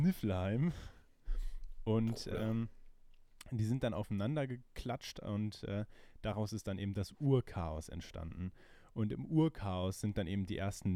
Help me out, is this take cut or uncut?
uncut